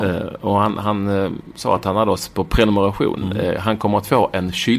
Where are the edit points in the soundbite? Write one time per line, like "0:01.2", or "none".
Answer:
0:03.2